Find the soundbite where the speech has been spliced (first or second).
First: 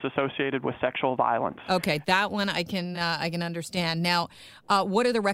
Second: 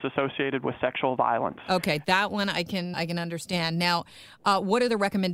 second